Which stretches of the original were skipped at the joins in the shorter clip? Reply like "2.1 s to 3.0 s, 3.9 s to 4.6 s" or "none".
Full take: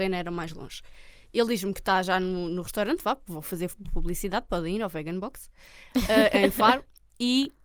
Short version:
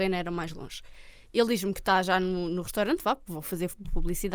none